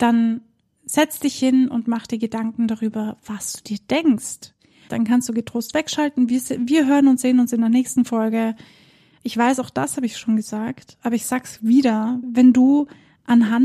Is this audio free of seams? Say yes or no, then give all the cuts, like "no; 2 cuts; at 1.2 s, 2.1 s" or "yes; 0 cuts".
no; 3 cuts; at 4.9 s, 9.2 s, 12.2 s